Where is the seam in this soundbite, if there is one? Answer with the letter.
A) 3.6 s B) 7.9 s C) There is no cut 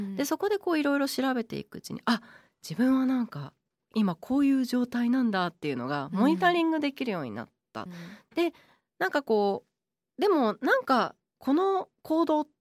B